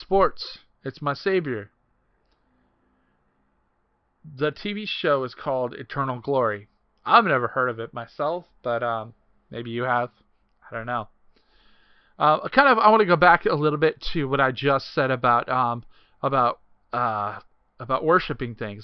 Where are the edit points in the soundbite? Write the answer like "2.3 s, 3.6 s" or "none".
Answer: none